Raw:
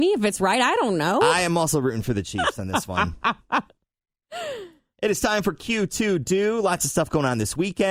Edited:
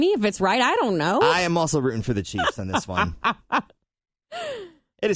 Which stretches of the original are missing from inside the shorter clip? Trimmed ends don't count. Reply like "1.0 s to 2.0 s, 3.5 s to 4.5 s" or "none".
none